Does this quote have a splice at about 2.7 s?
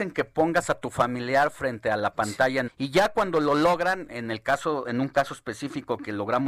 yes; 1 cut; at 2.7 s

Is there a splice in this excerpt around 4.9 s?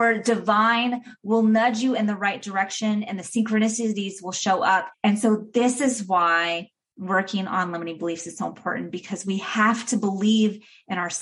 yes; 1 cut; at 4.9 s

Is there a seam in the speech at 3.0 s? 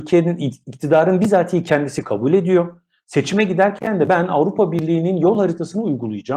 no; 0 cuts

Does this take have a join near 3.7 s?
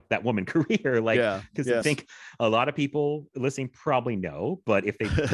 no; 1 cut; at 1.8 s

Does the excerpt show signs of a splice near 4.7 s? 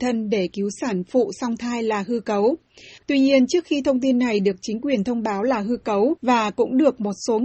no; 2 cuts; at 3.0 s, 6.2 s

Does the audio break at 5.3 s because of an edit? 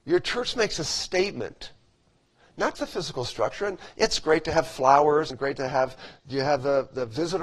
yes; 2 cuts; at 2.7 s, 5.3 s

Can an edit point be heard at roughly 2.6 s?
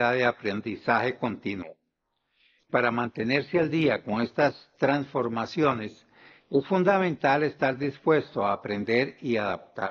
yes; 1 cut; at 2.6 s

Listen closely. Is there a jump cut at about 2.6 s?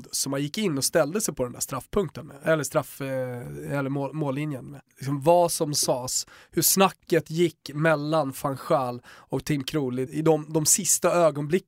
no; 2 cuts; at 4.9 s, 10.1 s

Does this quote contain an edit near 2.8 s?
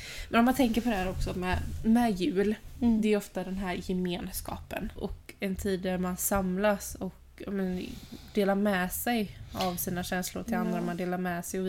no; 1 cut; at 5.0 s

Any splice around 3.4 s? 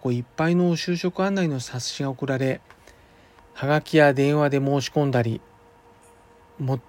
yes; 1 cut; at 3.4 s

